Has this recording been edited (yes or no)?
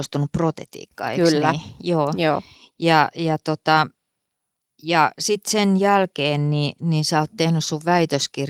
no